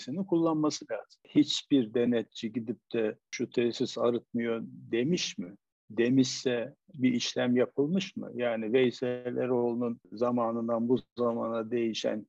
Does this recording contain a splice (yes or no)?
no